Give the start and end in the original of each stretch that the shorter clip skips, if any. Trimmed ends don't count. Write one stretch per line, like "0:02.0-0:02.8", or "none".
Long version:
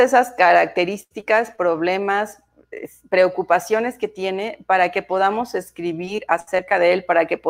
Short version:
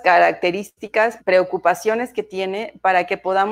0:01.5-0:03.0

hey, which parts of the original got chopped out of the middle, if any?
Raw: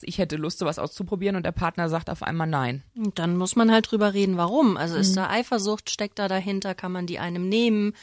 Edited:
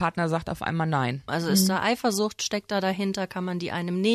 0:02.9-0:04.8

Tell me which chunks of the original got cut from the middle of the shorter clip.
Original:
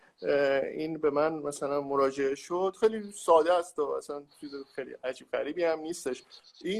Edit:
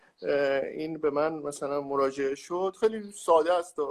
none

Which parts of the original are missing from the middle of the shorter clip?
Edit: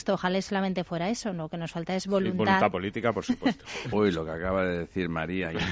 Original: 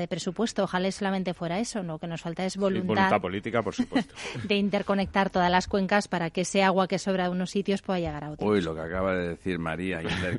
0:04.4-0:08.4

